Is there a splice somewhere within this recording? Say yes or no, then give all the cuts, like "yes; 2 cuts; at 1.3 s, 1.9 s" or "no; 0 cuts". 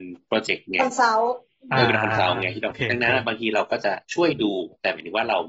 yes; 2 cuts; at 2.7 s, 4.0 s